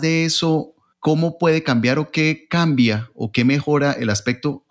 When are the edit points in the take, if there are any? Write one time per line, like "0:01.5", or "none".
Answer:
0:00.9

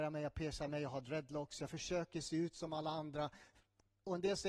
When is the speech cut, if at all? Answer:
none

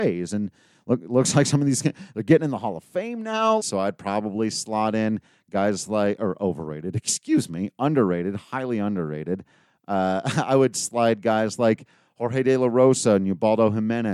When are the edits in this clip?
0:03.6

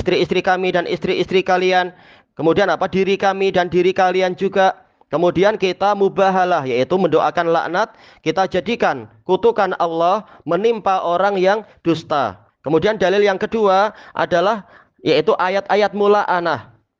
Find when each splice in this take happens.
0:12.5

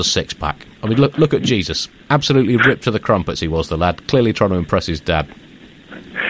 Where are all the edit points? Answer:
none

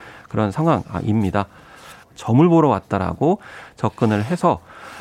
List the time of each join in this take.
0:02.0

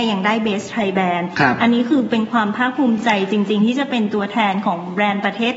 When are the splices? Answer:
none

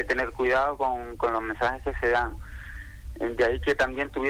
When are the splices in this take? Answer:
none

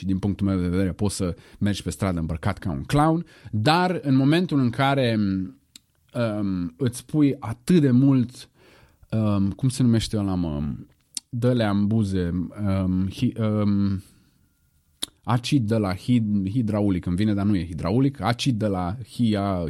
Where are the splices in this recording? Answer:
none

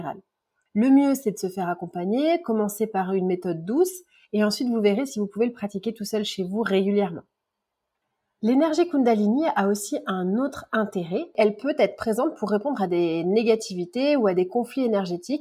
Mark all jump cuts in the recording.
none

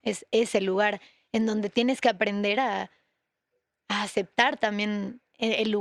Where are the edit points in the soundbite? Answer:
none

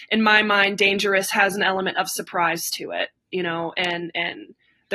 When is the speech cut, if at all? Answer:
none

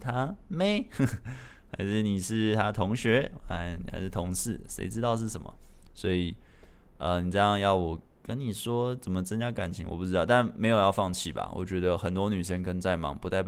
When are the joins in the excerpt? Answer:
none

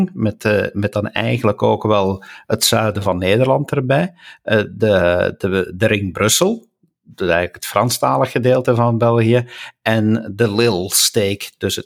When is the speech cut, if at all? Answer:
none

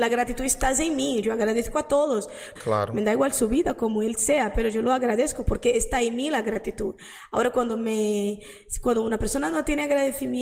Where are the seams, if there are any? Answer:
0:02.6

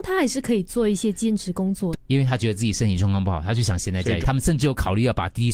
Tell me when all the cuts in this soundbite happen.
0:01.9
0:04.2

